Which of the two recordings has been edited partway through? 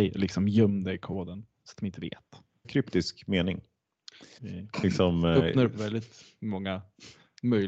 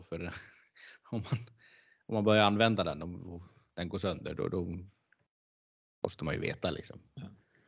first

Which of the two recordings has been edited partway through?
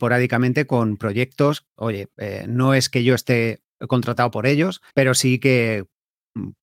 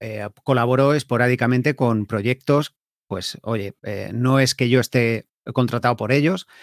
first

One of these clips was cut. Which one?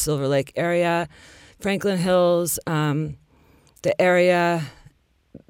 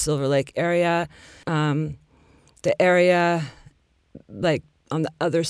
second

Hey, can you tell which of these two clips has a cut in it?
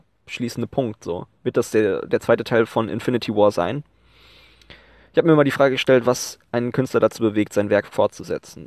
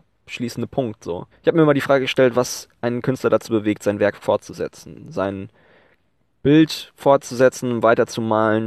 second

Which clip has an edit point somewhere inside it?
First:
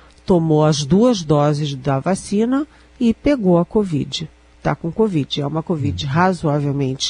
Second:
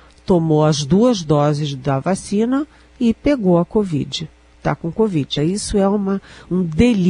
second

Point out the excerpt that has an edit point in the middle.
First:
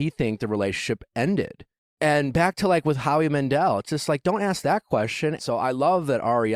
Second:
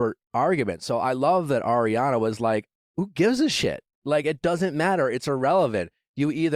first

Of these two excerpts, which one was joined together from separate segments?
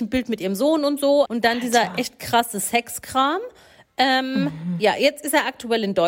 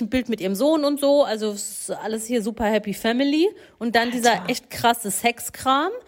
first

